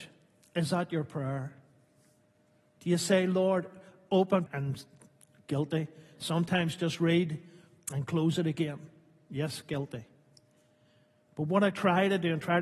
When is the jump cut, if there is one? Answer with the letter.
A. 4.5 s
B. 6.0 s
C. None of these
A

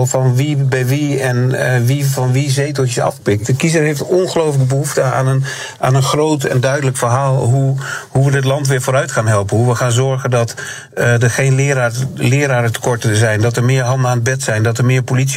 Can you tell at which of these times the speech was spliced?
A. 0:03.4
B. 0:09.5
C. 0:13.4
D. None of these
D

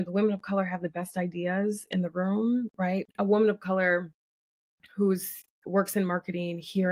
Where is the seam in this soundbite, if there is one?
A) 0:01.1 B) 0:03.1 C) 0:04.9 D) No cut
B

